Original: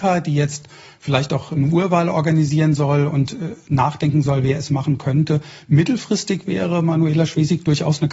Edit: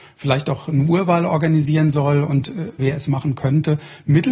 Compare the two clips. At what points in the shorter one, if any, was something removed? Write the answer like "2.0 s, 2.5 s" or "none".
2.8 s

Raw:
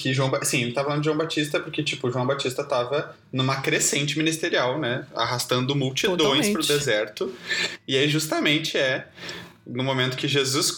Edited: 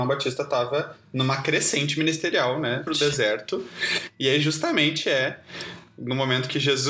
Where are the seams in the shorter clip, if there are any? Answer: 2.9 s

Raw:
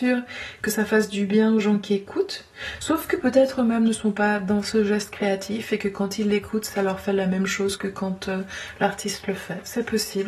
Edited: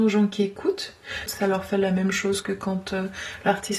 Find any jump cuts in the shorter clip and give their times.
1.3 s

